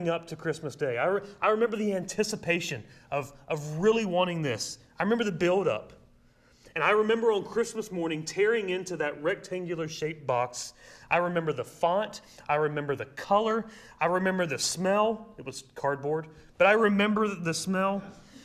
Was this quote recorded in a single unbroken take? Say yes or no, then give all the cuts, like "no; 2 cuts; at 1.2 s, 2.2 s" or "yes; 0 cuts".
yes; 0 cuts